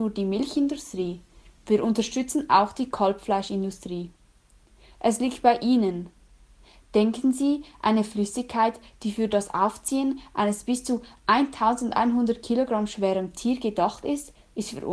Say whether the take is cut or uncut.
cut